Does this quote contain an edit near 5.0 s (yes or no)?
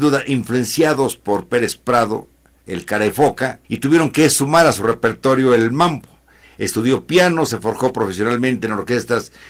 no